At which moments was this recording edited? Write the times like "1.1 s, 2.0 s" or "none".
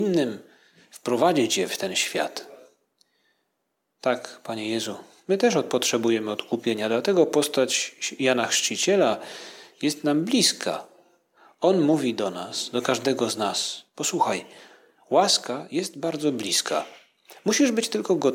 none